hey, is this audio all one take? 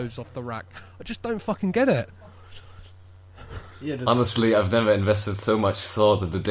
yes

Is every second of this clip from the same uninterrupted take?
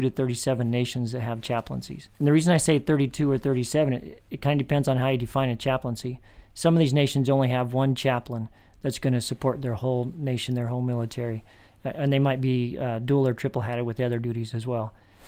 no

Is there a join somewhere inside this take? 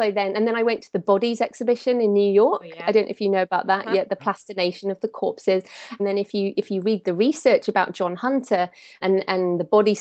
yes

